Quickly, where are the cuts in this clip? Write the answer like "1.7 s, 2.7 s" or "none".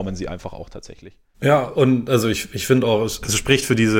none

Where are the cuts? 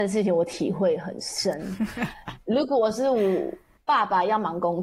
none

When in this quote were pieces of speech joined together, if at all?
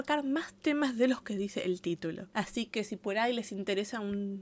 none

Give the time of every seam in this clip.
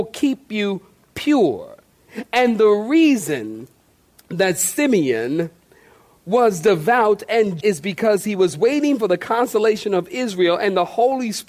7.6 s

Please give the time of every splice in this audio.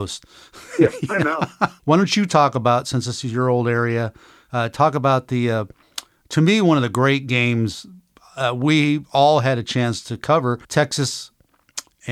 1.8 s, 10.6 s

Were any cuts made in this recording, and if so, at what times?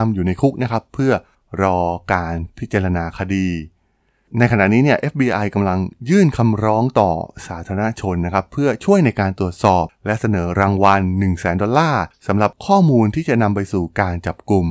none

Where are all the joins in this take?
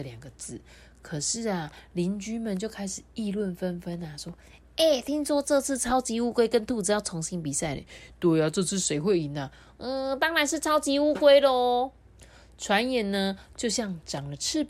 none

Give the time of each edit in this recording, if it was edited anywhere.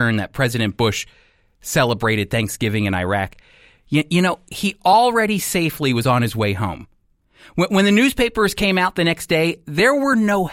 none

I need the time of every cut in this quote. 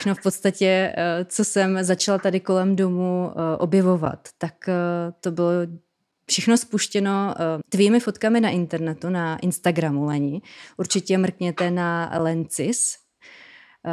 7.6 s

